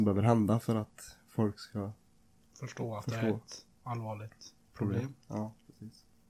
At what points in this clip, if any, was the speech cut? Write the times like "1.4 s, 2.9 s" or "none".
3.8 s